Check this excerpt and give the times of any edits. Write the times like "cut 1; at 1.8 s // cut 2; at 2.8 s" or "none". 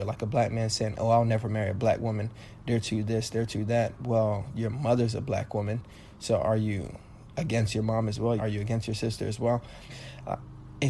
cut 1; at 8.4 s // cut 2; at 9.9 s